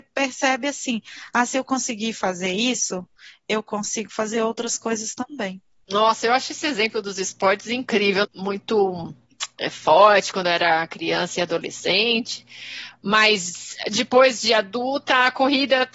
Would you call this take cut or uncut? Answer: cut